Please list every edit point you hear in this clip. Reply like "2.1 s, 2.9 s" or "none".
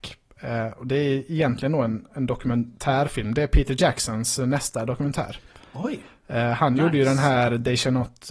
none